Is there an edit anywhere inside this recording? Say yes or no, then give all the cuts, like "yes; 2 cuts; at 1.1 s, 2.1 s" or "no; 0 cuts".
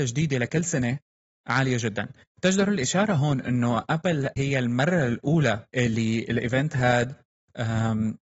yes; 2 cuts; at 4.4 s, 5.7 s